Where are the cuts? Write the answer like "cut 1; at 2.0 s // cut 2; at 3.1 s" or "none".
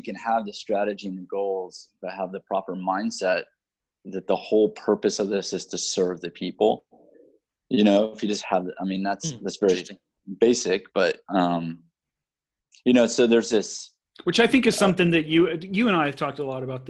none